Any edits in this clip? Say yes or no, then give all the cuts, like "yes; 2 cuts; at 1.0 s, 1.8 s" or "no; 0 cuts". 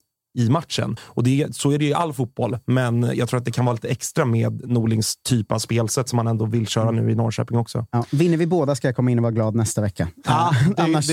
no; 0 cuts